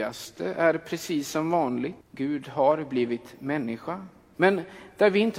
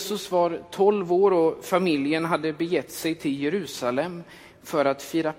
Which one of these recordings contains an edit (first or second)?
first